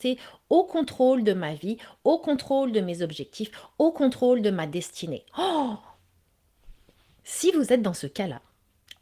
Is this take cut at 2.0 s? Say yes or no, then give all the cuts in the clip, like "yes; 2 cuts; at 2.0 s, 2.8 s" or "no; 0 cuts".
no; 1 cut; at 7.2 s